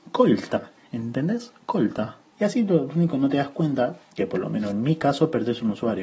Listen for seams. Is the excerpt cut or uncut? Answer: cut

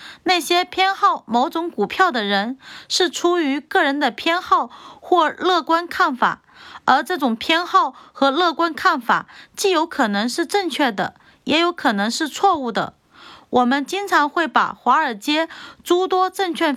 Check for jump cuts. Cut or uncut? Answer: uncut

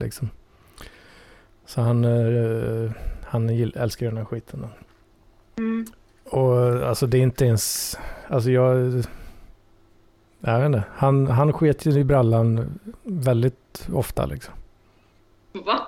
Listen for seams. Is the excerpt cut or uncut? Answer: uncut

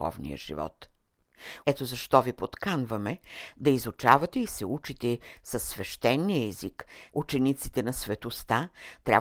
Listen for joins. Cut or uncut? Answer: cut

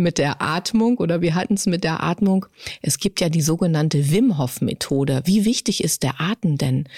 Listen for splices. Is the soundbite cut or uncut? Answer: uncut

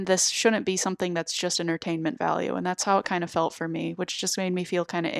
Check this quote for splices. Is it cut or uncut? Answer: uncut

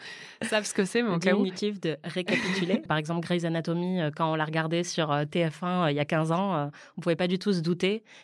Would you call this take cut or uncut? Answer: cut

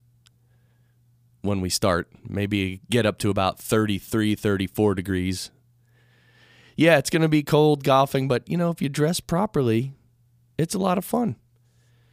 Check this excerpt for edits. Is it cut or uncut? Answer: uncut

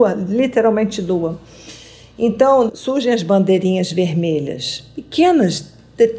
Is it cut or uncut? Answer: cut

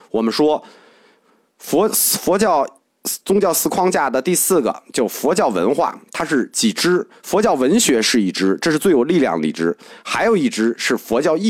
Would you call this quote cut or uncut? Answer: uncut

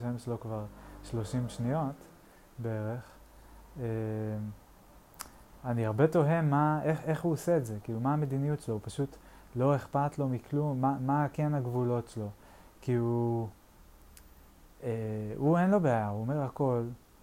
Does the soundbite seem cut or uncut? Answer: uncut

